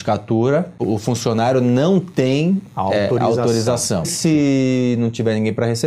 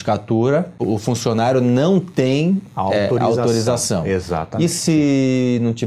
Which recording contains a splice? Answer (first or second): first